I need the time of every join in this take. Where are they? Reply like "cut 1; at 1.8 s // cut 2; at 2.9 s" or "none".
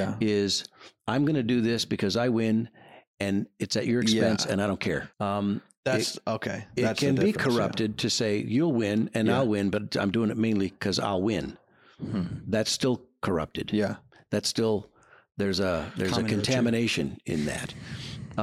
cut 1; at 5.1 s